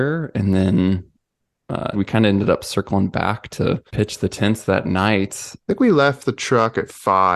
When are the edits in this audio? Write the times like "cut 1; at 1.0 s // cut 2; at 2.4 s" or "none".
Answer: cut 1; at 1.9 s // cut 2; at 3.9 s // cut 3; at 5.6 s